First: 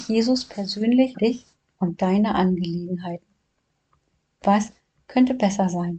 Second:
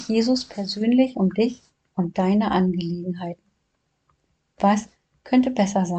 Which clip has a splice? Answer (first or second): first